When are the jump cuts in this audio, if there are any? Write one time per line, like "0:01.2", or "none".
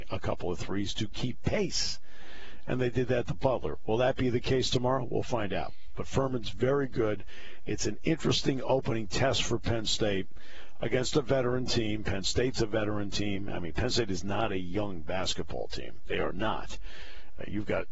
none